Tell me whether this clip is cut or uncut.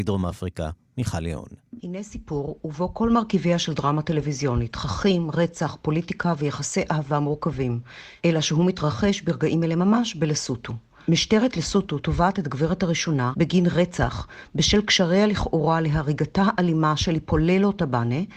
cut